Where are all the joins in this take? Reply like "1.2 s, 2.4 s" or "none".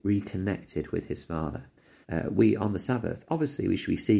2.0 s